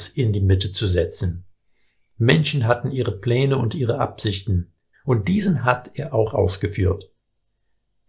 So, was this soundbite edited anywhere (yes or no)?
yes